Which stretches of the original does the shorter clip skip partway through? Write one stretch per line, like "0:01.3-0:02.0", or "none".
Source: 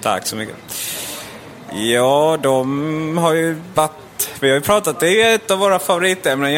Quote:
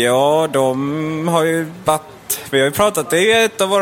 none